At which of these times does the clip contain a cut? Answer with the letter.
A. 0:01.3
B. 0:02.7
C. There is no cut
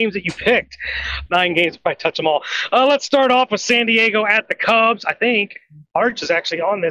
A